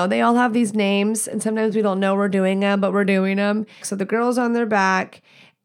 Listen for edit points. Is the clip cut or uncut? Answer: cut